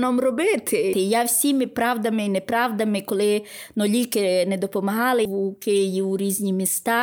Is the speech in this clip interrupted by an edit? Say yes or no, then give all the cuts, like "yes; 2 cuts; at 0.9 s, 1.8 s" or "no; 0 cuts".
yes; 2 cuts; at 0.9 s, 5.3 s